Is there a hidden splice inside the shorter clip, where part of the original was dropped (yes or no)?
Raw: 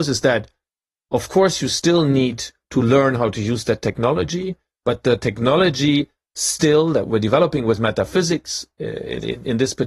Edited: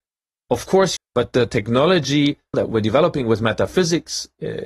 yes